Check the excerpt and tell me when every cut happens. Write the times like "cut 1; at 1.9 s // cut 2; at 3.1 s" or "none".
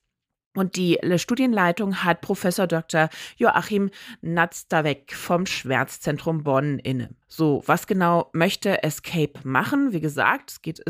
cut 1; at 7.2 s

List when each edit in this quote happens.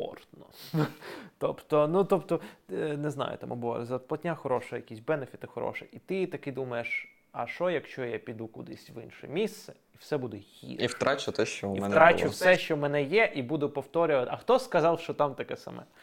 none

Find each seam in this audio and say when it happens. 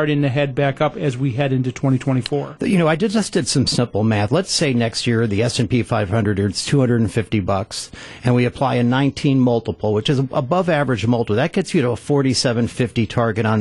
cut 1; at 2.6 s

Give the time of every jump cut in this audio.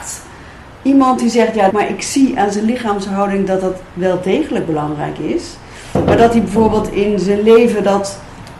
cut 1; at 1.7 s

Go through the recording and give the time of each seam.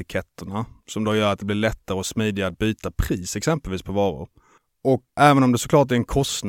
cut 1; at 5.2 s

